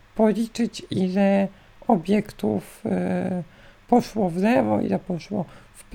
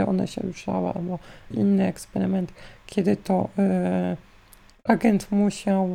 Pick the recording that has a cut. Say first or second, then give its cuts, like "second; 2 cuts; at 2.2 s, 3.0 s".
second; 1 cut; at 1.5 s